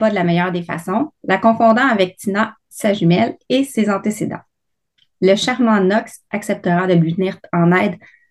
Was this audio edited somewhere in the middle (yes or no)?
no